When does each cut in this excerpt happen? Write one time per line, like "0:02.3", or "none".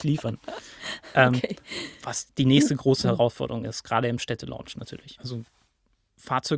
0:05.2